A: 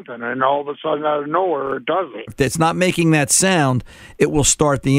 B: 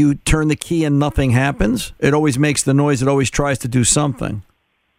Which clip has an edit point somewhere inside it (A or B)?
A